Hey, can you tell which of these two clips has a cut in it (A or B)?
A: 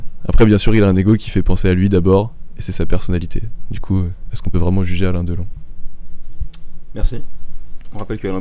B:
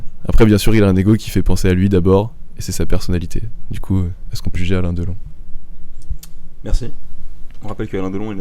B